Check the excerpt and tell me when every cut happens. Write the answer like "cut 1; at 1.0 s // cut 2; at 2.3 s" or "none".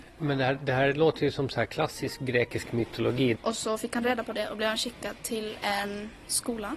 cut 1; at 3.3 s